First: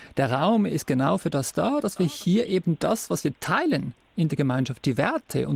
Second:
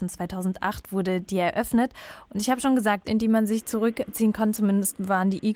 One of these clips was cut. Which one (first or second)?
second